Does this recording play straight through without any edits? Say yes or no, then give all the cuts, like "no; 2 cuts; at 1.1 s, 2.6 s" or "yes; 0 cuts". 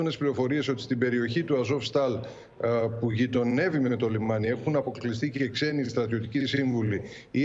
yes; 0 cuts